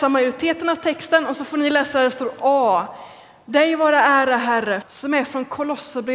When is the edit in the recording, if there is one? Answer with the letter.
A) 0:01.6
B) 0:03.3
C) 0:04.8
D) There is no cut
C